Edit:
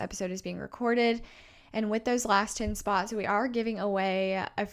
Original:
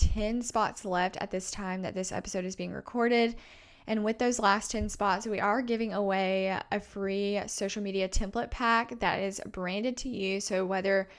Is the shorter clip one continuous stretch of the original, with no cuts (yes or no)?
yes